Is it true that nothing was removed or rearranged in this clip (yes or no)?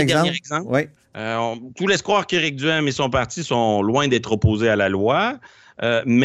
no